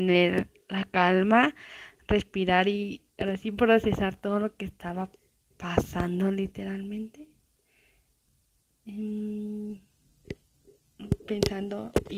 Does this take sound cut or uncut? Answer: uncut